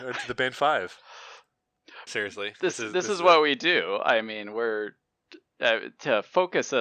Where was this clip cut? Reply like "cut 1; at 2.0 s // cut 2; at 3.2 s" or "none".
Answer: cut 1; at 2.1 s

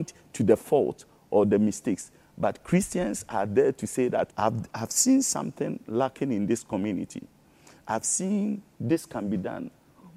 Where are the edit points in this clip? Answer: cut 1; at 4.3 s

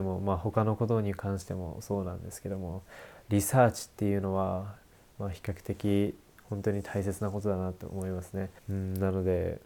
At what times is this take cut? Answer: cut 1; at 8.6 s

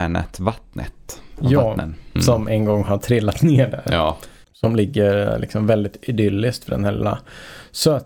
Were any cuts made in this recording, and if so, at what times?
cut 1; at 2.2 s // cut 2; at 4.4 s

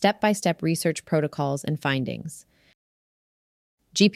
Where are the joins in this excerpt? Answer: none

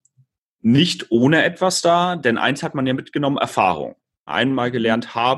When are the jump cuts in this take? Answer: cut 1; at 4.3 s

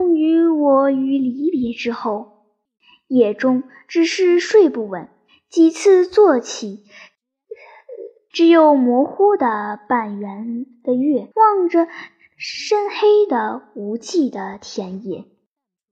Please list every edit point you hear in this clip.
cut 1; at 8.3 s // cut 2; at 11.3 s

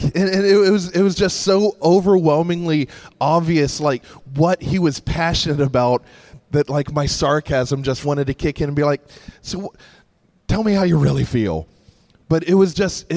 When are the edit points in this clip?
cut 1; at 8.0 s

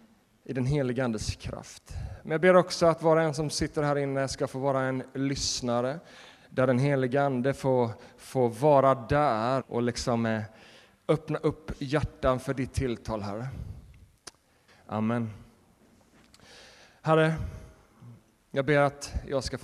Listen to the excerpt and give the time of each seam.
cut 1; at 9.6 s // cut 2; at 14.7 s

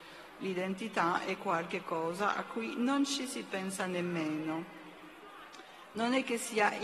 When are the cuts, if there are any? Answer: cut 1; at 1.4 s

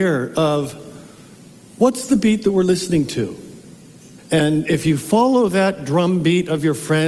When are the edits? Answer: cut 1; at 4.2 s

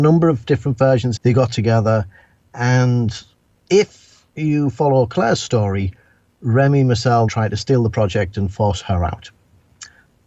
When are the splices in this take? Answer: cut 1; at 1.2 s // cut 2; at 7.3 s

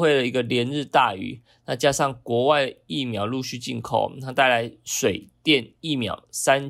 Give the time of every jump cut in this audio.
none

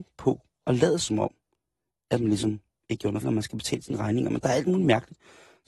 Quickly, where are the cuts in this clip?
cut 1; at 3.2 s

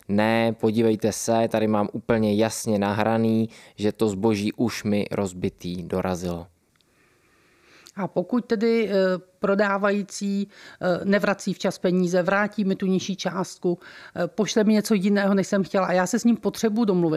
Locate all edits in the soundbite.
none

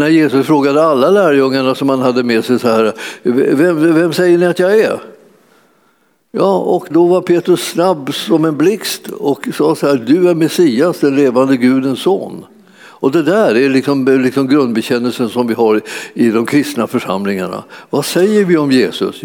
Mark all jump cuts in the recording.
cut 1; at 6.9 s

